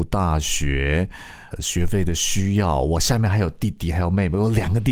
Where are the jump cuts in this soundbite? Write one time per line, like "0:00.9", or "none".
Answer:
0:01.5